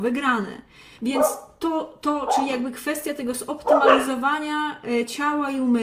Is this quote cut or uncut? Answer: cut